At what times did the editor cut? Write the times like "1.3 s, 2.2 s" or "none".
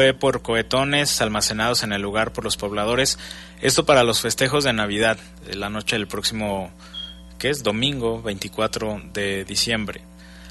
none